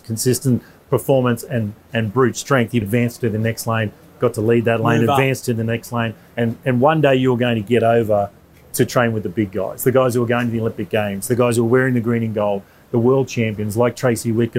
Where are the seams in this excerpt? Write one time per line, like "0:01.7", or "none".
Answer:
0:02.8

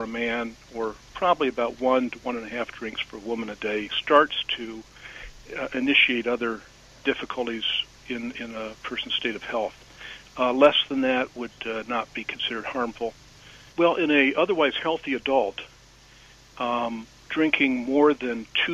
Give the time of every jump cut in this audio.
0:13.7

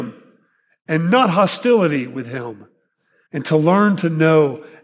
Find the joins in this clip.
0:03.3

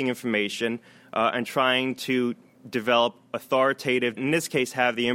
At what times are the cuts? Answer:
0:04.2

